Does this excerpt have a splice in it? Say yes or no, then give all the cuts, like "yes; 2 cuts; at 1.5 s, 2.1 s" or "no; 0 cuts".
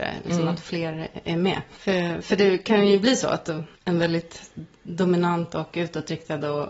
yes; 1 cut; at 3.7 s